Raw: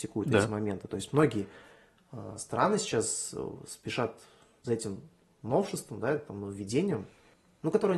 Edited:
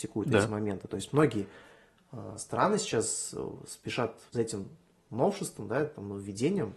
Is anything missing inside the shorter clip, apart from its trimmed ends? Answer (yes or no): yes